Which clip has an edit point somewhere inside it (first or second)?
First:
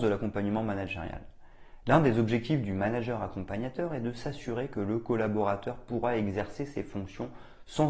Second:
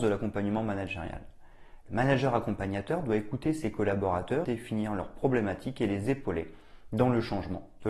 second